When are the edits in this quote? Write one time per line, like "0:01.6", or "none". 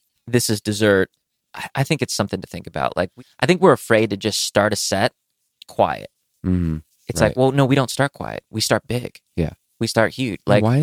none